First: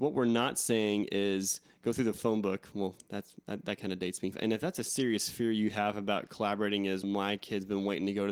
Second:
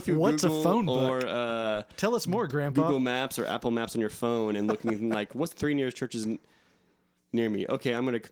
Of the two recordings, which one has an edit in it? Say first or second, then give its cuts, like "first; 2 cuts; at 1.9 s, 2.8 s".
first; 2 cuts; at 4.3 s, 7.0 s